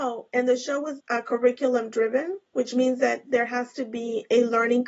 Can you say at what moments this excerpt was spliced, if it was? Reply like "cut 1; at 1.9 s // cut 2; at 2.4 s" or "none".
cut 1; at 1.0 s